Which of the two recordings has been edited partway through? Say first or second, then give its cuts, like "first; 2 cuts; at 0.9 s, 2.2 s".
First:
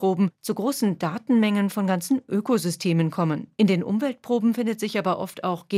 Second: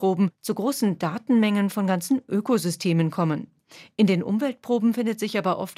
first; 1 cut; at 3.5 s